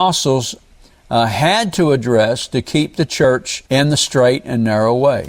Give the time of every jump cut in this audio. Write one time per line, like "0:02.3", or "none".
0:03.7